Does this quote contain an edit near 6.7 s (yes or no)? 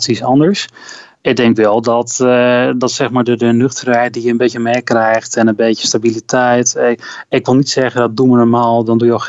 no